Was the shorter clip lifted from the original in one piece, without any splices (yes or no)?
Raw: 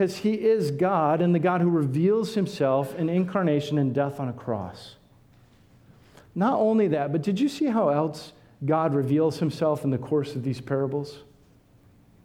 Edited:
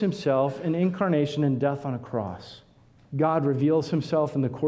no